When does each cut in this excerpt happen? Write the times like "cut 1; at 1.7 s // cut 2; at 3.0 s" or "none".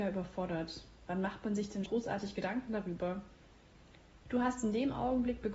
cut 1; at 1.9 s // cut 2; at 4.2 s